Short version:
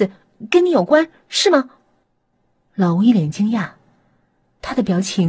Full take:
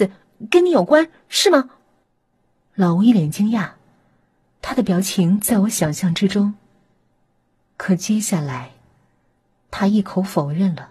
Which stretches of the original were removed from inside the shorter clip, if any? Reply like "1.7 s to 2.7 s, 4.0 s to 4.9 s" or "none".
none